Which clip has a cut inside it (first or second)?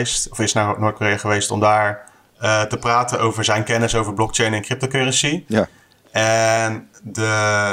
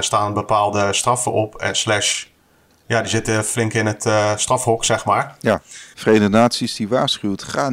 second